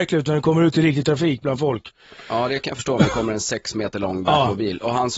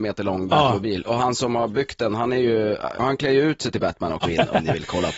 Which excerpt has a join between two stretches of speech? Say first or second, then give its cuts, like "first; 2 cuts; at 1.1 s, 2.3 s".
second; 2 cuts; at 3.0 s, 4.2 s